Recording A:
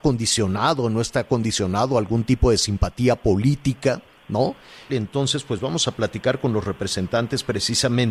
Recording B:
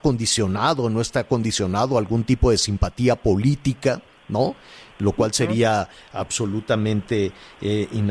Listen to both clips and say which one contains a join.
A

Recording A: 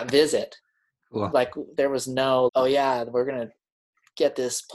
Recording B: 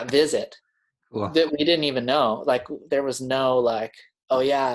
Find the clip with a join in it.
A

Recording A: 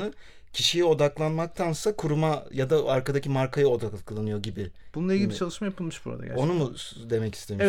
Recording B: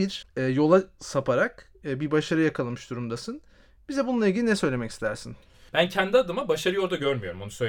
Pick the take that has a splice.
B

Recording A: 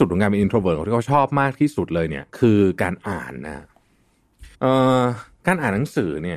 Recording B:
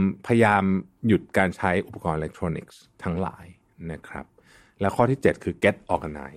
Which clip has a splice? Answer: A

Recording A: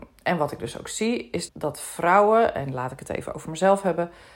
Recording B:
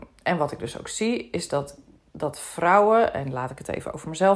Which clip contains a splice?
A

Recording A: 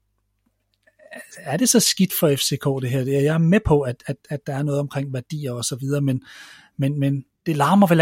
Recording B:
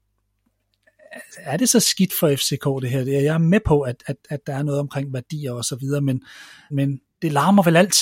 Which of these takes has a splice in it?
B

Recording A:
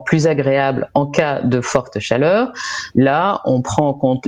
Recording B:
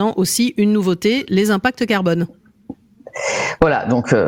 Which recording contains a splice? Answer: A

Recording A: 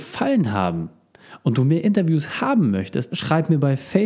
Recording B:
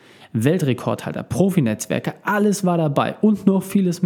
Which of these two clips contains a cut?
A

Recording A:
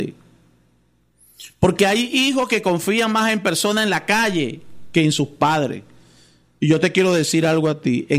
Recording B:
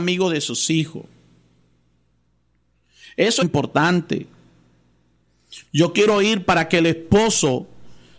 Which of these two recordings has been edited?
B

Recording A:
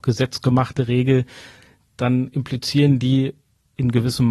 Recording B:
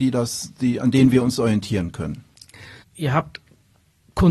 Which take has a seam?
B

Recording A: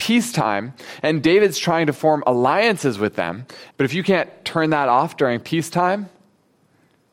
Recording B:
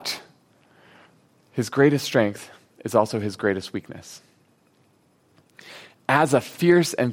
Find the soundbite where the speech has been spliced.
A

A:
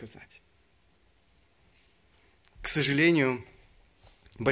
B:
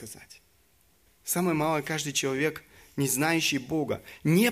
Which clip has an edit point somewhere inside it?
B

